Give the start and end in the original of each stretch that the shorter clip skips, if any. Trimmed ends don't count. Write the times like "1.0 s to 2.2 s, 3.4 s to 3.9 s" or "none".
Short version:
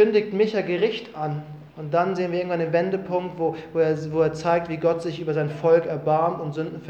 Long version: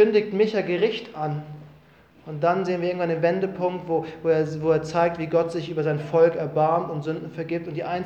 1.7 s to 2.2 s